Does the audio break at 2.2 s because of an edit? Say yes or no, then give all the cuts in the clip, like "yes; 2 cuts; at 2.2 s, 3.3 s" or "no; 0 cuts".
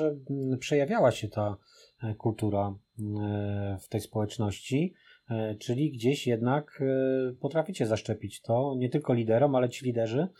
no; 0 cuts